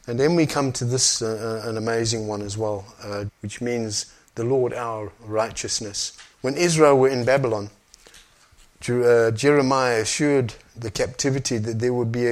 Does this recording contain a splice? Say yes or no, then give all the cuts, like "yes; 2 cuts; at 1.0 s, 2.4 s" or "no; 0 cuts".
yes; 2 cuts; at 3.3 s, 6.3 s